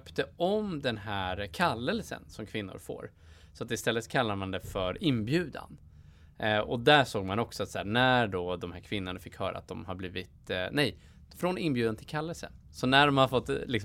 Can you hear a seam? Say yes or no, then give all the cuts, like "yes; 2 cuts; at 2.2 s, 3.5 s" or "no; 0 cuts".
no; 0 cuts